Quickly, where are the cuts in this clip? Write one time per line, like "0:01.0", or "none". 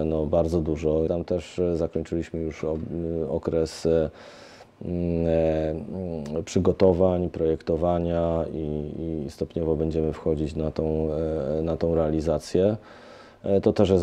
0:01.1

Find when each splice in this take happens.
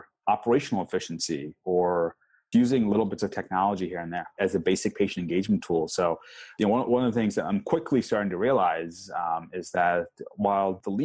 0:02.5

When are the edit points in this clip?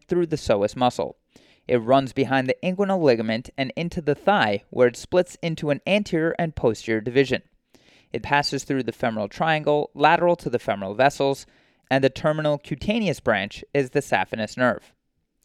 0:08.2

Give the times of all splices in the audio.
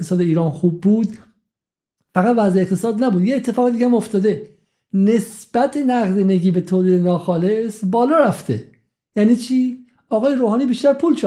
none

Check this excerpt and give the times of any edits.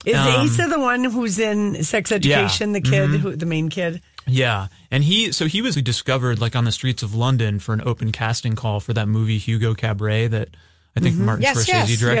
0:05.7

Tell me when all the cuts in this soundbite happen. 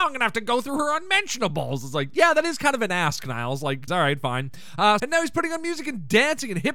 0:03.9
0:05.0

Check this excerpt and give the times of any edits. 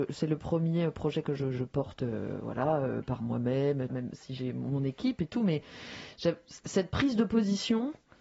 0:03.9

